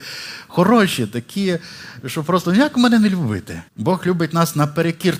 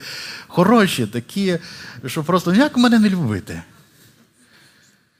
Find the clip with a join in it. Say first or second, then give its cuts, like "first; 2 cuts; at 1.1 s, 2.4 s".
first; 1 cut; at 3.7 s